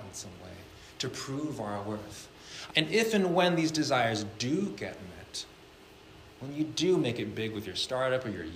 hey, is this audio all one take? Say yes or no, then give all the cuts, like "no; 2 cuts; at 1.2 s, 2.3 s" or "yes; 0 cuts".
no; 2 cuts; at 2.7 s, 6.3 s